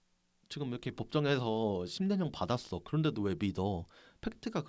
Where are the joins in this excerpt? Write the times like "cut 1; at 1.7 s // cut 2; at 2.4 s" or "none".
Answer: none